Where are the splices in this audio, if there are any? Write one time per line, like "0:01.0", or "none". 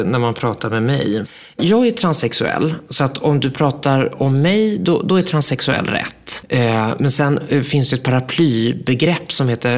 none